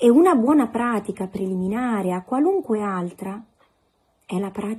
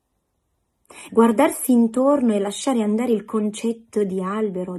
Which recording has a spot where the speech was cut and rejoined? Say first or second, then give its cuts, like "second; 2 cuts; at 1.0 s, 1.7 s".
second; 1 cut; at 1.1 s